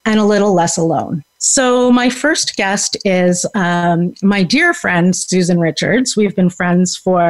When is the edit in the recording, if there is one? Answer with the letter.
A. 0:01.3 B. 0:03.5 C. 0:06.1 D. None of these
A